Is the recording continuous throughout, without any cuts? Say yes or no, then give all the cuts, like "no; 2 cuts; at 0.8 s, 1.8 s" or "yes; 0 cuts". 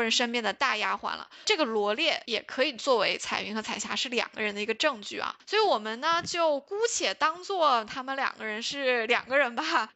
yes; 0 cuts